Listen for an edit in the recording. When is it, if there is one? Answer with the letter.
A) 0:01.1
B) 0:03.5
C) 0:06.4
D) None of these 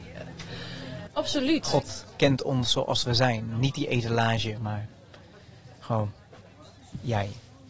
A